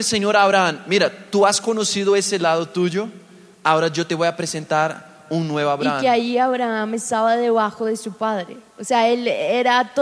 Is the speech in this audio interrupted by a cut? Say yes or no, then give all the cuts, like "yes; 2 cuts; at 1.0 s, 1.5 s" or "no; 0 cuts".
no; 0 cuts